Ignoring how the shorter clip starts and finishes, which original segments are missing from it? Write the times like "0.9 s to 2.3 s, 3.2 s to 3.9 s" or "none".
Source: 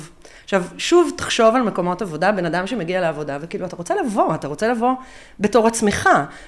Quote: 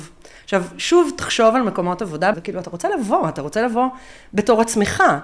2.3 s to 3.4 s